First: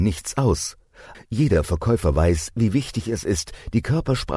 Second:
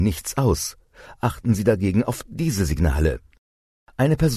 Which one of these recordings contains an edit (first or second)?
first